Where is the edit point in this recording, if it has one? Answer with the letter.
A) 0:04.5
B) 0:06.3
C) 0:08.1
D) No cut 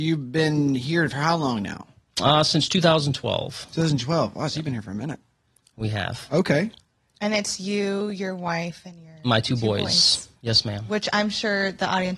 D